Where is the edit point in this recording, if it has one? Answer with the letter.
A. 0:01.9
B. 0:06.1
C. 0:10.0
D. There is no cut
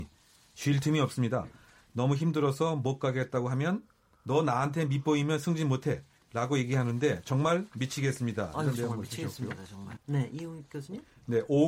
C